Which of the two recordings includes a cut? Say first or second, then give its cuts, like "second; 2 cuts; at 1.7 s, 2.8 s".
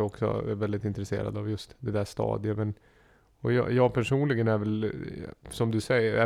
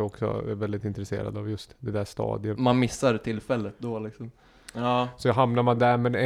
second; 2 cuts; at 2.6 s, 4.7 s